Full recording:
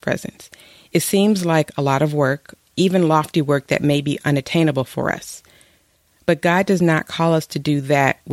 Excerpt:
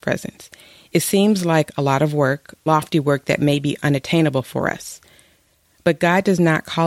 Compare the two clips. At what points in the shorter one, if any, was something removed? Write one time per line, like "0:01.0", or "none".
0:02.7